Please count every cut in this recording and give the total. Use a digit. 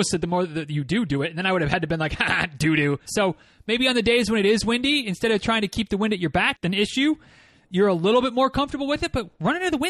2